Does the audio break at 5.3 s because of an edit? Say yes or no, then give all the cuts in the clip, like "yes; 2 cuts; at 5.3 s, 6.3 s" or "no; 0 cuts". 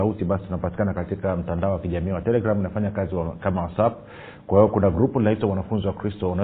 no; 1 cut; at 2.2 s